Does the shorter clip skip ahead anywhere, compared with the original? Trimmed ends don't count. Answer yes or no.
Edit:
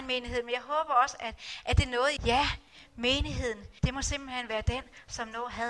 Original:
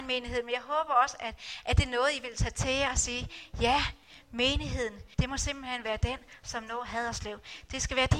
yes